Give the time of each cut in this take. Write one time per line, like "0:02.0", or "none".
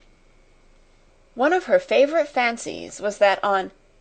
none